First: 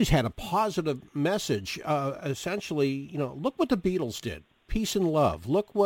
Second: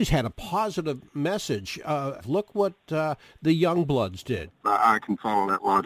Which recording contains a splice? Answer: second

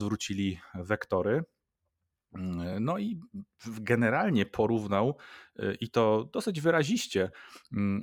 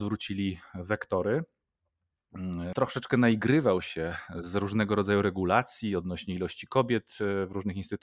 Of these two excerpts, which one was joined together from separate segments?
second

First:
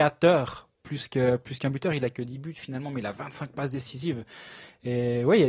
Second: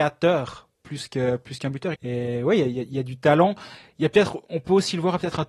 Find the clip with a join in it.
second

